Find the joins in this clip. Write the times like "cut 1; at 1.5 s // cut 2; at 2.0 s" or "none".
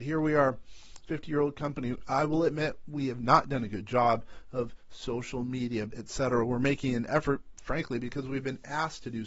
cut 1; at 5.9 s